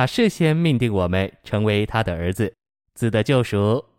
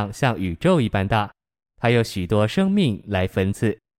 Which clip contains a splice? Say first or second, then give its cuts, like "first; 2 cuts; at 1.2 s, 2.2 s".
first; 1 cut; at 2.7 s